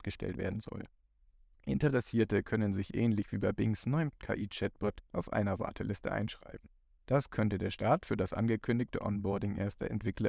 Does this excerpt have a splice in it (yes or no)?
no